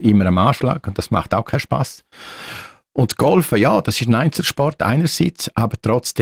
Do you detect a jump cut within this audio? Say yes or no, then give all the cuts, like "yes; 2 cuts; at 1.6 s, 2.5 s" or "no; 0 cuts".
no; 0 cuts